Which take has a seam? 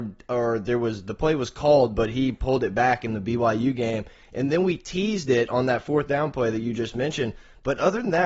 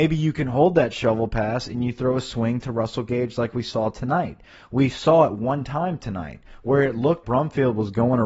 second; 1 cut; at 7.2 s

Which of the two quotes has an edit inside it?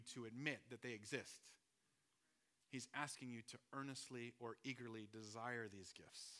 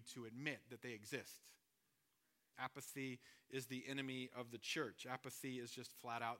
second; 1 cut; at 2.5 s

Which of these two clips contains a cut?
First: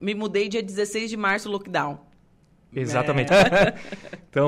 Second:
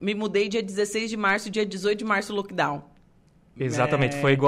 first; 2 cuts; at 1.4 s, 3.3 s

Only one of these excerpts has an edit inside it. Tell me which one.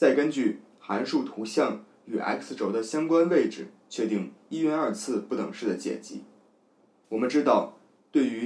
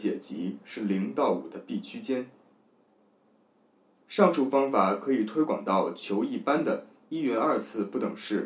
first; 1 cut; at 7.0 s

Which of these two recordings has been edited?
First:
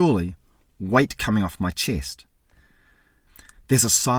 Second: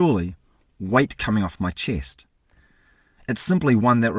second; 1 cut; at 3.1 s

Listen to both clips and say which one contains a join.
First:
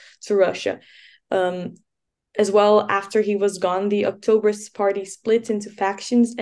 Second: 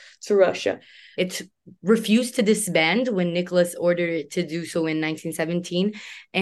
second; 1 cut; at 1.1 s

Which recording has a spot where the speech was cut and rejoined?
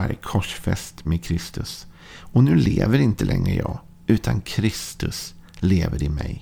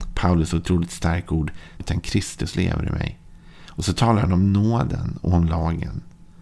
second; 1 cut; at 1.8 s

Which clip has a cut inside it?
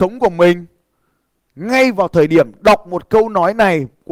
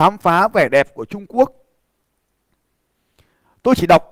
first; 1 cut; at 1.5 s

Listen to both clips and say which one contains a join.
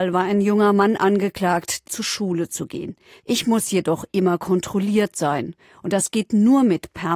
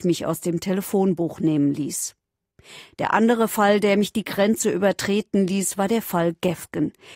first; 2 cuts; at 1.8 s, 3.2 s

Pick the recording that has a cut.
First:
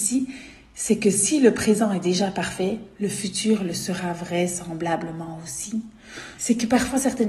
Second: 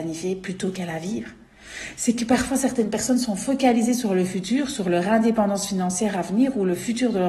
first; 1 cut; at 6.4 s

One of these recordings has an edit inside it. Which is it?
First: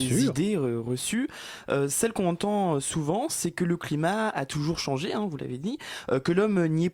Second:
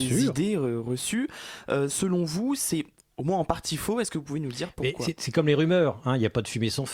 second; 1 cut; at 1.9 s

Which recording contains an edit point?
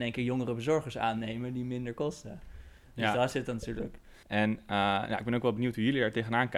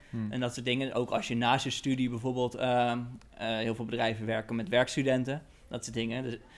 first; 1 cut; at 4.2 s

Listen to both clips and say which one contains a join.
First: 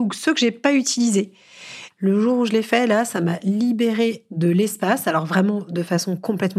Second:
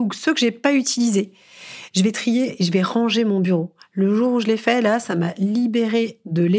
first; 1 cut; at 1.9 s

